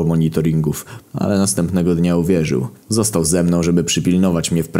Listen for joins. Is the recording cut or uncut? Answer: cut